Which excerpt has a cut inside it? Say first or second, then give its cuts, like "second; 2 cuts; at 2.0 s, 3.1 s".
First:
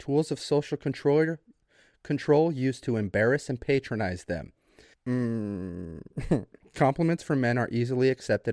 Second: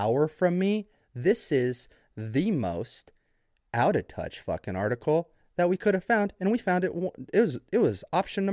first; 1 cut; at 4.9 s